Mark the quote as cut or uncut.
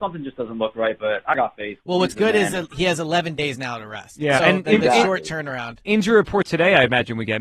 uncut